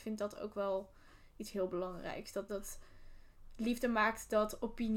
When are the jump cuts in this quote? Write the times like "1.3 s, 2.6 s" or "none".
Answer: 2.5 s